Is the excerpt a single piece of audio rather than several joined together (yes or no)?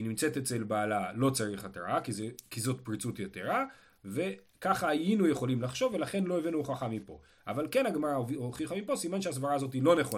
yes